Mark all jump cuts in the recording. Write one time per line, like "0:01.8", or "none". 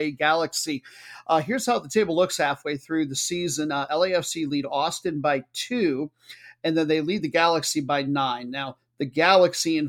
none

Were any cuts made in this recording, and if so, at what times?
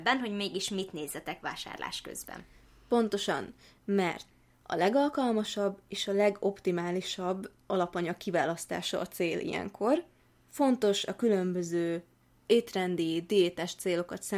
none

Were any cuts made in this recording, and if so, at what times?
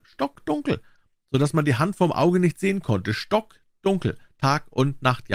none

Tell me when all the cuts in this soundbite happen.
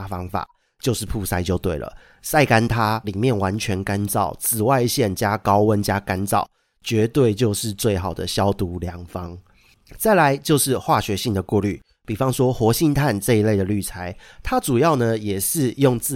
0:03.0

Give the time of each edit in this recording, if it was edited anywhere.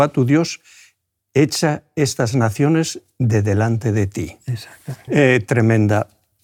0:05.1

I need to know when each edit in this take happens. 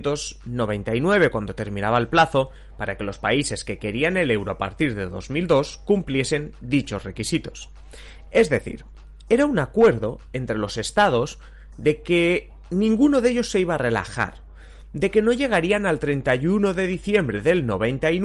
none

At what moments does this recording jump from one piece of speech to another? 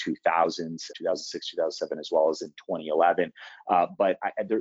0:00.9

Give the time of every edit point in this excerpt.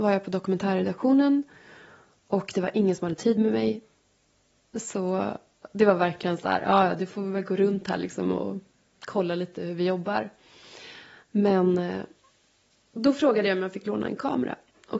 none

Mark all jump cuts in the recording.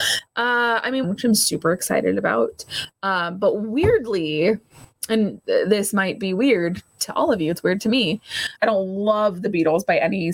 0:01.0
0:08.6

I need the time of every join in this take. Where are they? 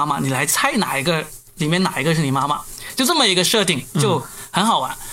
none

